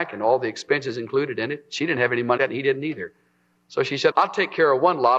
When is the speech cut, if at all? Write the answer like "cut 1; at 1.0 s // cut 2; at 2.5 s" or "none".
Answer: cut 1; at 2.4 s // cut 2; at 4.1 s